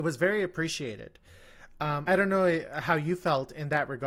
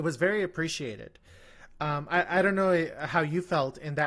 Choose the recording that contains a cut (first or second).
first